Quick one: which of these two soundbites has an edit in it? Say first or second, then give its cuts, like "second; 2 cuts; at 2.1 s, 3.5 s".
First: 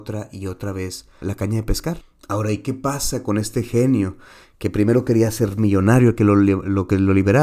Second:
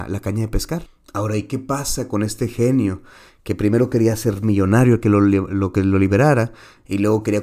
first; 1 cut; at 1.2 s